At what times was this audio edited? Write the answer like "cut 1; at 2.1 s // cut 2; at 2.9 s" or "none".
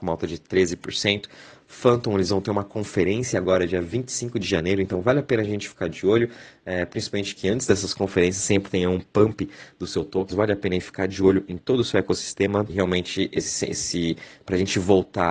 cut 1; at 10.3 s // cut 2; at 12.7 s